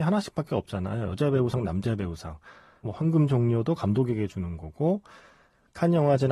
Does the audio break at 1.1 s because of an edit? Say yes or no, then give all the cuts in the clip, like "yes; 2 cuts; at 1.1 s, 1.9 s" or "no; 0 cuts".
no; 1 cut; at 2.8 s